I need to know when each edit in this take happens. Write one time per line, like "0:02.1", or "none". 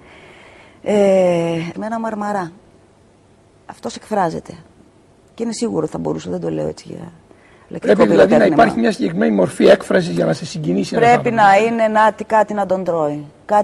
0:01.7